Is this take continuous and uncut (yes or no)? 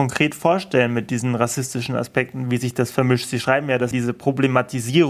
no